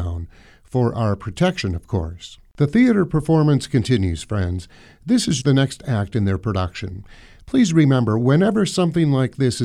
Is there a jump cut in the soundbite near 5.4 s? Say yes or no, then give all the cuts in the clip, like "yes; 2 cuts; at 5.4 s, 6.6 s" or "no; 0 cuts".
yes; 1 cut; at 5.4 s